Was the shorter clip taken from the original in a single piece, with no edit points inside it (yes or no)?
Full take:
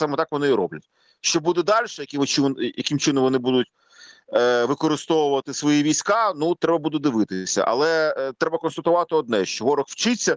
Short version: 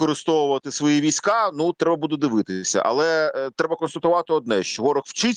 yes